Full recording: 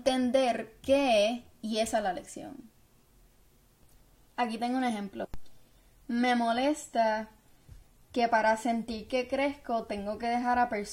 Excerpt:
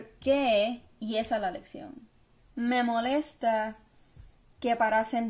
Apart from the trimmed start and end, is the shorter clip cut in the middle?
yes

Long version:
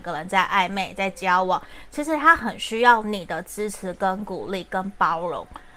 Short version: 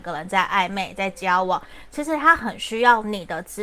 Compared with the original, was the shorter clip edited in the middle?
no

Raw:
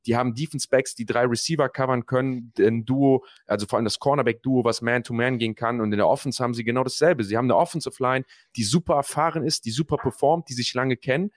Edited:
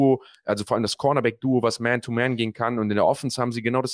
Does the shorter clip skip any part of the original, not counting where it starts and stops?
no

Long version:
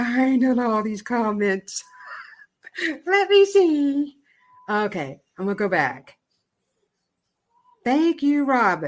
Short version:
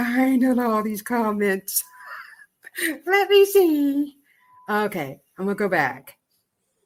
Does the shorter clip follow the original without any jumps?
yes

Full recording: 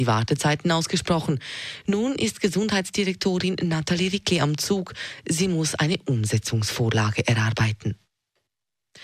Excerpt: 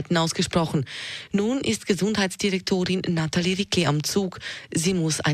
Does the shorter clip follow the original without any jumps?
yes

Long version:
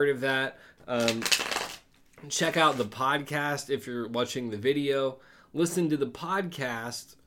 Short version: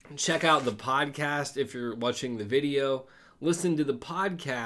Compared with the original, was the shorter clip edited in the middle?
no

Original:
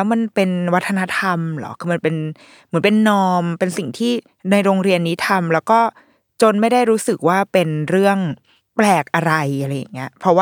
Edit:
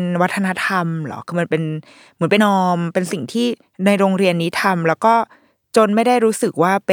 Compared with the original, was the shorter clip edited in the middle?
yes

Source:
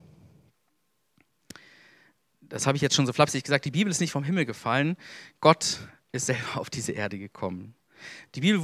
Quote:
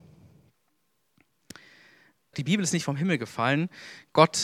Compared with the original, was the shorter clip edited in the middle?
yes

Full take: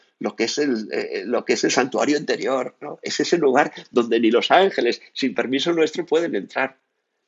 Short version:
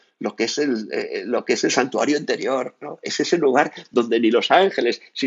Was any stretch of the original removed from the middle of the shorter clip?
no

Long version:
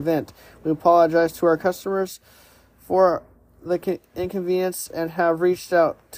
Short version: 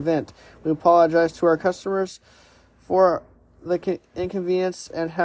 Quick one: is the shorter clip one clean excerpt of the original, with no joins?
yes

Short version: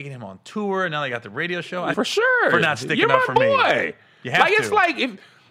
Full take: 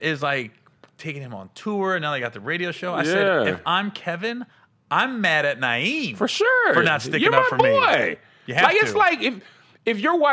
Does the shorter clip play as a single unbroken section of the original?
no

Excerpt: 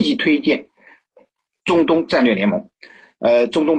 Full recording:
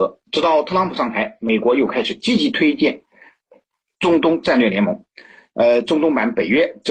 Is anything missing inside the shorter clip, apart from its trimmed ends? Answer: no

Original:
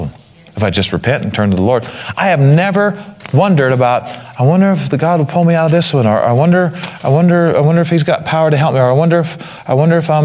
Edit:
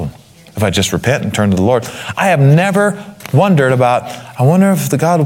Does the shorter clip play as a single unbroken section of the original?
yes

